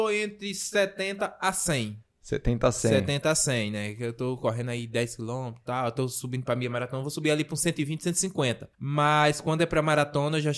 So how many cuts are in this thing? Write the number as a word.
one